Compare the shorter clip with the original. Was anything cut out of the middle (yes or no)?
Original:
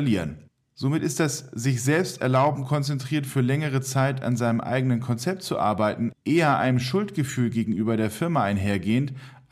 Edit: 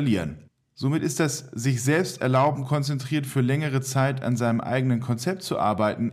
no